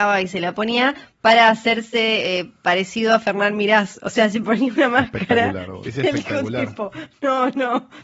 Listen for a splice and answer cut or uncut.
cut